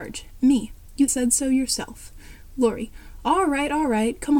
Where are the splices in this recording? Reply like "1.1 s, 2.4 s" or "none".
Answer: 1.1 s